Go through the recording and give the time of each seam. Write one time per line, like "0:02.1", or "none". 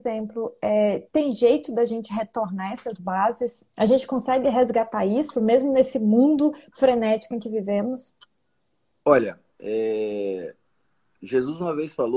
0:03.7